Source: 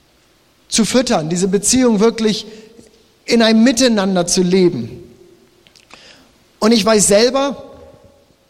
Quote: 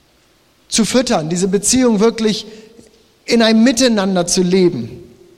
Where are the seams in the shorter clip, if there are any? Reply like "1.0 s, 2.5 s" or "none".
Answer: none